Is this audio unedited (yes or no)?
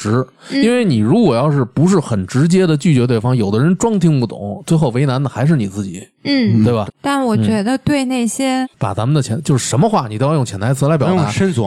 no